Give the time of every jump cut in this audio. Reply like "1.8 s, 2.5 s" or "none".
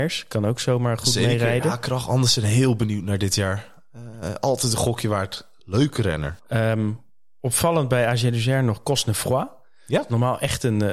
1.0 s, 6.4 s